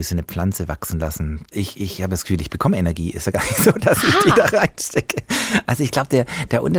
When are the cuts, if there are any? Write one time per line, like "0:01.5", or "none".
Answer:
0:01.5